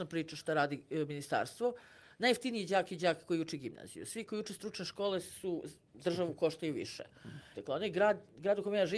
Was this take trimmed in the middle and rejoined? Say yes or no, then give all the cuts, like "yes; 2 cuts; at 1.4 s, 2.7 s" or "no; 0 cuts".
yes; 1 cut; at 7.5 s